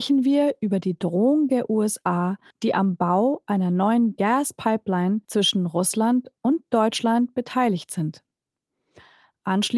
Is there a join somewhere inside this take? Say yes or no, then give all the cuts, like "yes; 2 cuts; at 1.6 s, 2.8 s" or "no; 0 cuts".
yes; 2 cuts; at 2.5 s, 5.2 s